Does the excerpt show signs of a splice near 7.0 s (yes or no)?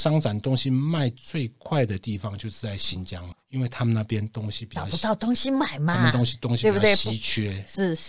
no